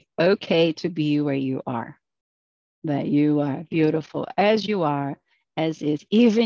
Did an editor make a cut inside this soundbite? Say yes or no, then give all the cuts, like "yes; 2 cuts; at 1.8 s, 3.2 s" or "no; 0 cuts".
no; 0 cuts